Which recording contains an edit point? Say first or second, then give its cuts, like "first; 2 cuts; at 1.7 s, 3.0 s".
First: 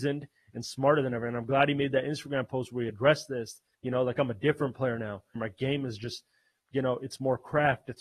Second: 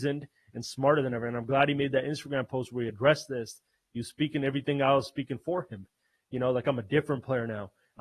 first; 2 cuts; at 3.7 s, 5.4 s